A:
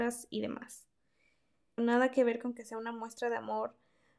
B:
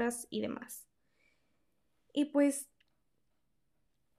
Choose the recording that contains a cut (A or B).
A